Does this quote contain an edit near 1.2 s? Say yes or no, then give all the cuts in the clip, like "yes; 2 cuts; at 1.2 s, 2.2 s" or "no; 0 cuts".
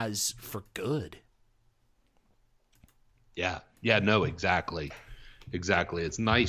no; 0 cuts